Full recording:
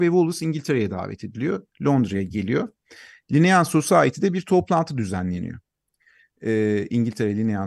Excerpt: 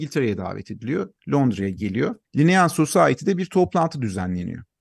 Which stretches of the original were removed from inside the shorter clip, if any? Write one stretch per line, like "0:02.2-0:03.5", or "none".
0:02.8-0:03.2